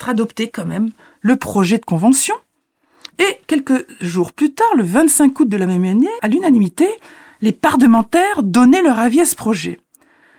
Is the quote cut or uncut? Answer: cut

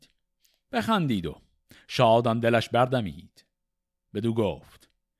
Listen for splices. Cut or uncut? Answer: uncut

